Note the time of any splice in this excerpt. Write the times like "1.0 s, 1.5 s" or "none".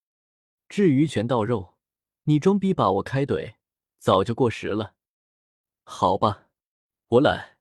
1.1 s